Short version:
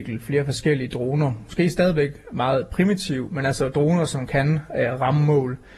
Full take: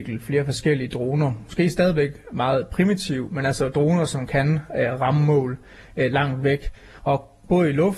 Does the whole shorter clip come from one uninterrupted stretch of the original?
yes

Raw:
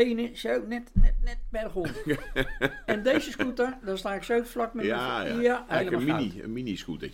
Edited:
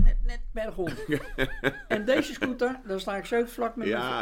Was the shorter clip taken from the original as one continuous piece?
yes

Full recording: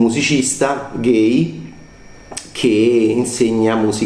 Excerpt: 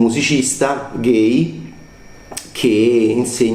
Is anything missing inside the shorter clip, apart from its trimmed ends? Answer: no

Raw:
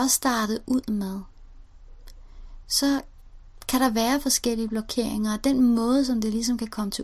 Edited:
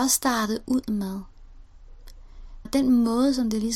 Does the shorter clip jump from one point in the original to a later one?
yes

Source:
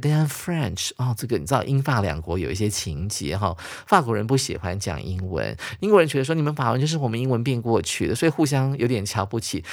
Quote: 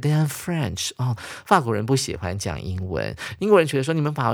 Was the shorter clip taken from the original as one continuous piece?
no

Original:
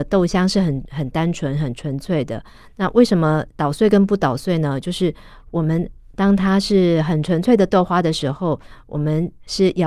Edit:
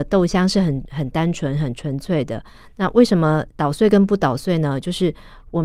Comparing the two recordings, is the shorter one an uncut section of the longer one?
yes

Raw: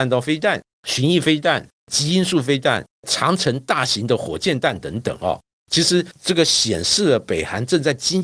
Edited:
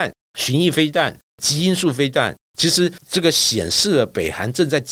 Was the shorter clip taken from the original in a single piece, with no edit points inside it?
no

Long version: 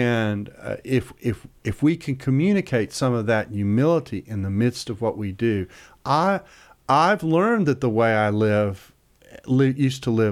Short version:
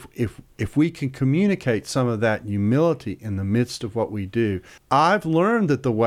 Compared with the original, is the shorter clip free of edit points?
no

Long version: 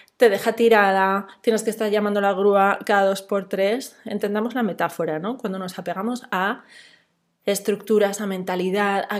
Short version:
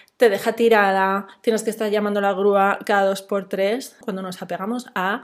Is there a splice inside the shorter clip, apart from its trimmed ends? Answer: yes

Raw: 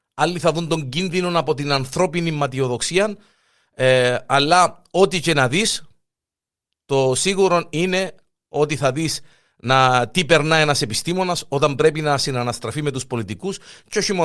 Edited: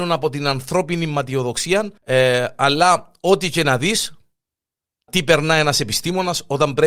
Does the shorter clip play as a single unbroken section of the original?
no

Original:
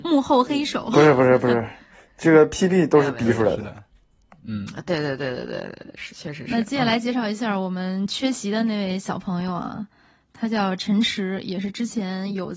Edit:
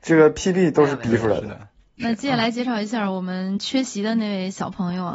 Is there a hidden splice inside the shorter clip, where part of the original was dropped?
yes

